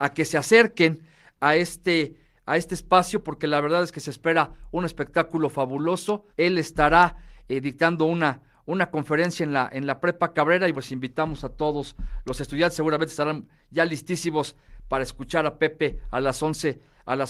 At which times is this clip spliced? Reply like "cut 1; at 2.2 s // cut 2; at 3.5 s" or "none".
cut 1; at 6.3 s // cut 2; at 10.7 s